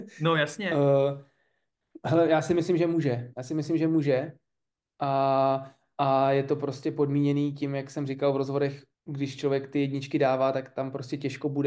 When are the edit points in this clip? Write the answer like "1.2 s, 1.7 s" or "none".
8.9 s